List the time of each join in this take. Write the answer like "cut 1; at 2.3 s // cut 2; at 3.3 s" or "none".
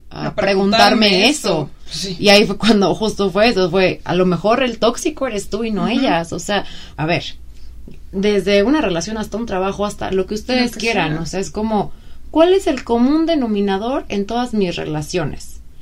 cut 1; at 6.9 s